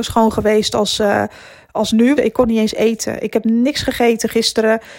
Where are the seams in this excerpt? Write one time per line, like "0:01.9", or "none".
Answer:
0:02.2

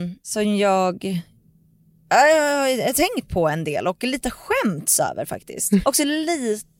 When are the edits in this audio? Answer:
0:05.8

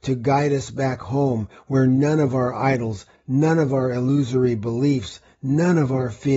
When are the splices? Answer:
none

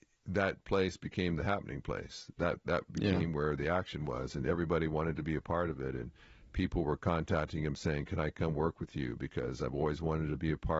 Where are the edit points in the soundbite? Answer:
none

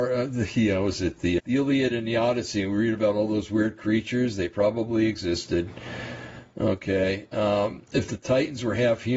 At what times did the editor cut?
0:01.4

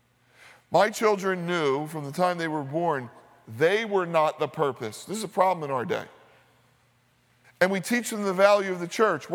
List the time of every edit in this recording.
0:07.4

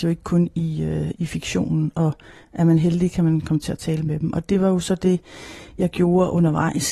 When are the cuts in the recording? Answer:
0:01.1

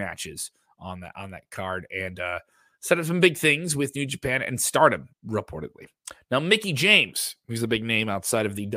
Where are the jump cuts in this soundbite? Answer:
0:05.1

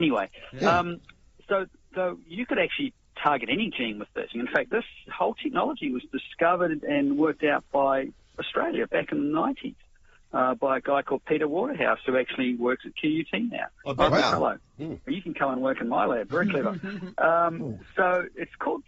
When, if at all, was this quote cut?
0:04.3
0:15.1

